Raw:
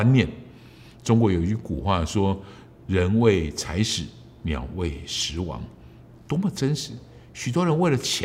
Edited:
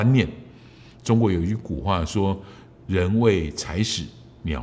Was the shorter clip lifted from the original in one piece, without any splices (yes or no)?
yes